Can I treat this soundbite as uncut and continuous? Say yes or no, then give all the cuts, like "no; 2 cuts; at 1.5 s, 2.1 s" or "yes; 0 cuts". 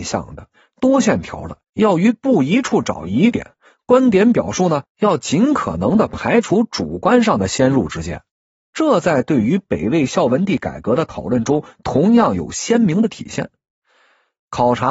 no; 2 cuts; at 1.6 s, 8.6 s